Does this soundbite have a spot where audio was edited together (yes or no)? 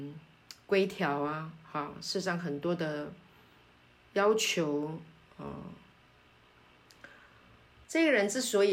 yes